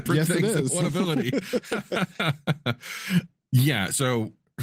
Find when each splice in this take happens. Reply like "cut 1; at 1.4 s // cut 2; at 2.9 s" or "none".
none